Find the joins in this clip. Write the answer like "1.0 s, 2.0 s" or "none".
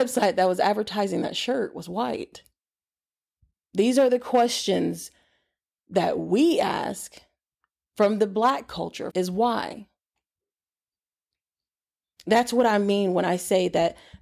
3.6 s, 9.1 s